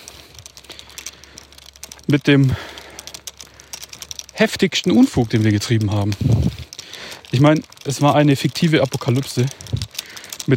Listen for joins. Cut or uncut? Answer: uncut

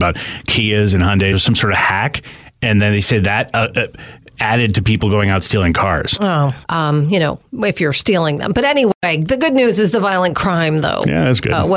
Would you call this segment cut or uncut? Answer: cut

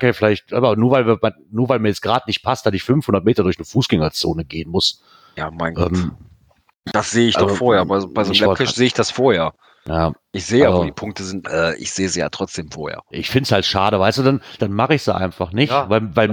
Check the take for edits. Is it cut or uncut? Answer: cut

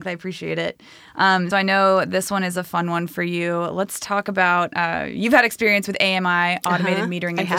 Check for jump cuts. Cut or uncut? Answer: cut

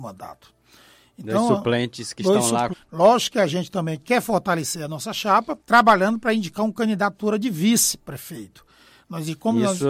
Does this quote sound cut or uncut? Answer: cut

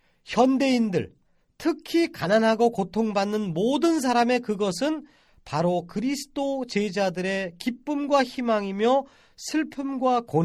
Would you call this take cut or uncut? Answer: uncut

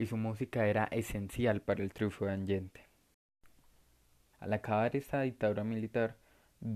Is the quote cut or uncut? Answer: cut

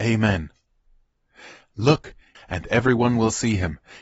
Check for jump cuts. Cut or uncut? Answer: cut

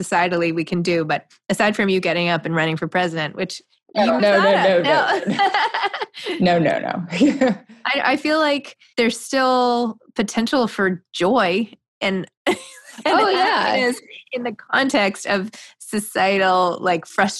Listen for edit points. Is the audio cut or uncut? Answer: cut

